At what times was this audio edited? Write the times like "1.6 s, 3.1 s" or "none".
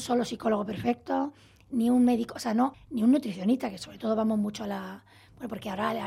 2.7 s

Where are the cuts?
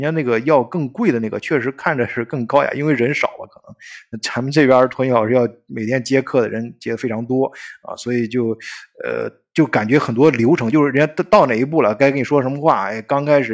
none

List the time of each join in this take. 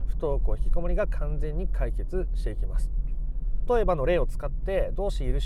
3.7 s

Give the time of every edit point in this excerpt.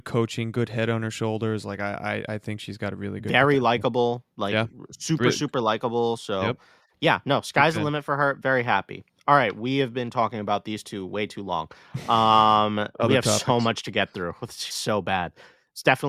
14.7 s

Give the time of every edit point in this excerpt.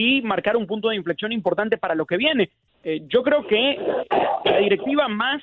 2.7 s

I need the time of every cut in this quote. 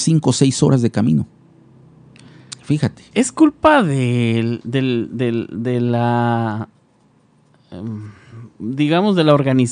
none

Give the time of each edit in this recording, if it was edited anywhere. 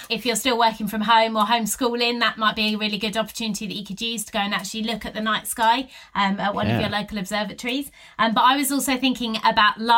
none

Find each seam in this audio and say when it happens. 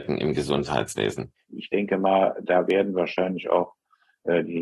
1.5 s

